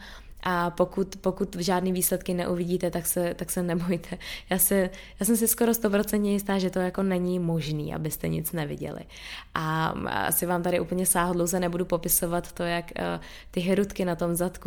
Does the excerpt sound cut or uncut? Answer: uncut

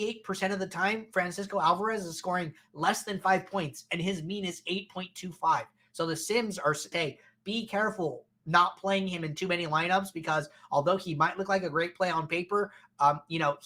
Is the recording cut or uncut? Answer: cut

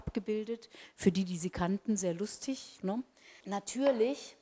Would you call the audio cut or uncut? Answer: cut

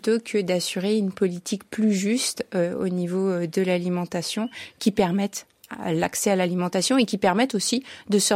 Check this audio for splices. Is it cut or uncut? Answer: uncut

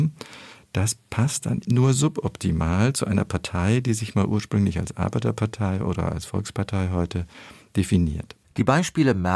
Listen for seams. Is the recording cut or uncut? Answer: cut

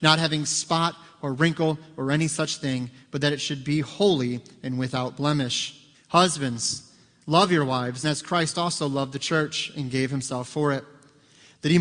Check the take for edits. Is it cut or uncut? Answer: cut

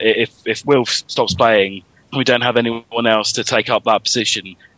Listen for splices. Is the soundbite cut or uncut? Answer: cut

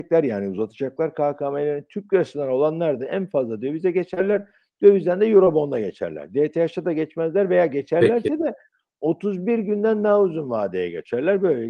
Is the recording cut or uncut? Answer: uncut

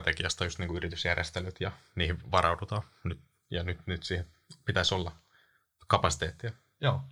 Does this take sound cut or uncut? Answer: uncut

